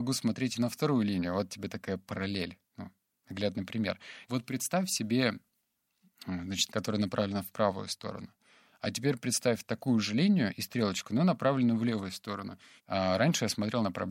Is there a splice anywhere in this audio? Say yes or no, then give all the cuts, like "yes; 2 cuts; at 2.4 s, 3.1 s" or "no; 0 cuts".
yes; 3 cuts; at 4.2 s, 6.7 s, 12.8 s